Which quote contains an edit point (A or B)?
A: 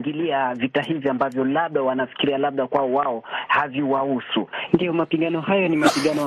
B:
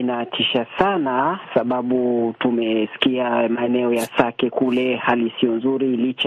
A